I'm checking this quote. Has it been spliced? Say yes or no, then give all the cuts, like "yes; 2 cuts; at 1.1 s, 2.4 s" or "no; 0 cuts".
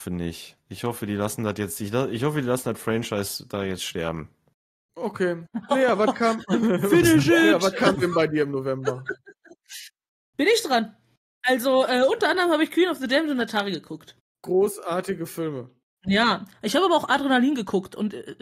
yes; 1 cut; at 5.5 s